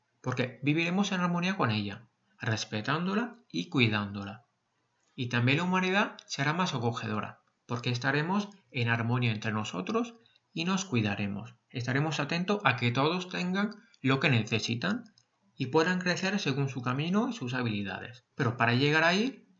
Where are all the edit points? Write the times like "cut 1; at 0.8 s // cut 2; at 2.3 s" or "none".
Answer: cut 1; at 18.3 s